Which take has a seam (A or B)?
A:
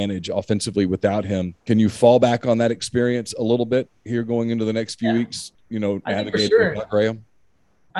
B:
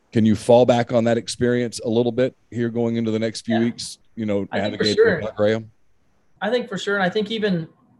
A